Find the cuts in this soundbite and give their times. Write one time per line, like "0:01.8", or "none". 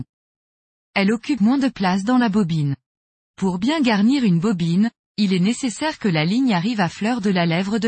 0:01.4